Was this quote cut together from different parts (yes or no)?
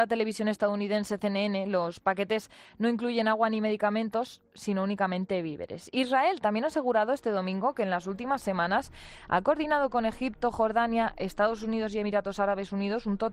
no